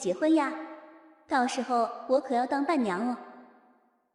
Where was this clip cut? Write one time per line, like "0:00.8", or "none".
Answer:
none